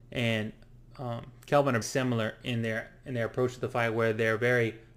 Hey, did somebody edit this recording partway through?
yes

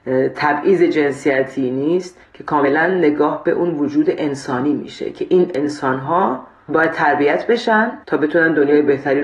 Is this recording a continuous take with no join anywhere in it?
no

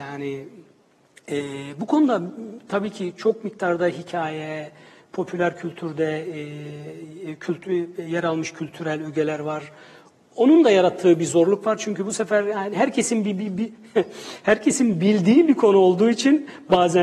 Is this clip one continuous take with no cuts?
yes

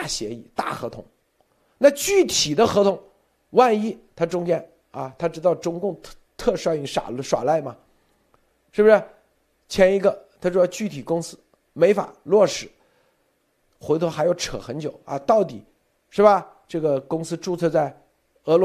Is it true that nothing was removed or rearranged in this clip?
yes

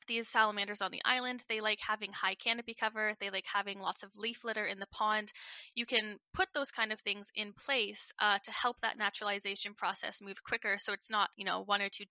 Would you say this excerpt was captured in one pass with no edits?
yes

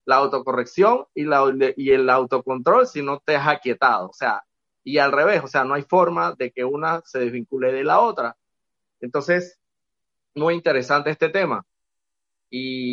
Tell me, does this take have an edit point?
no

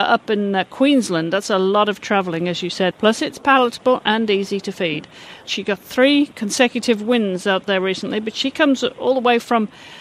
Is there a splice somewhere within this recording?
yes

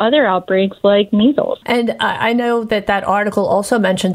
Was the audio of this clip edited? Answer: yes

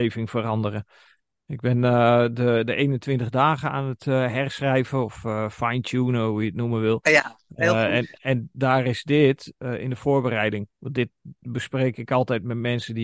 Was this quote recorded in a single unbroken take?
yes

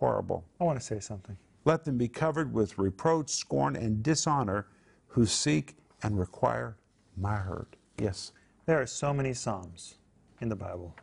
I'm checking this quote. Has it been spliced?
no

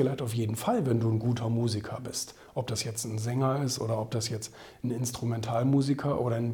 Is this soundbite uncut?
yes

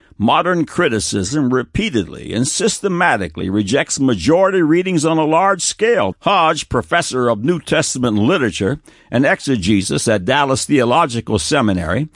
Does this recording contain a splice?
yes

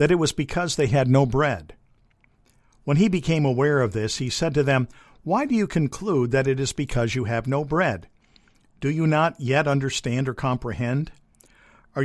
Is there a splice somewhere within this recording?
no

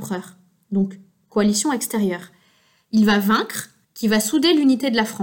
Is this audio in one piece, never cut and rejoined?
no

